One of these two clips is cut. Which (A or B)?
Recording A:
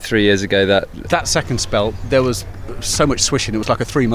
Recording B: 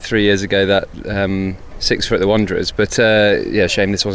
A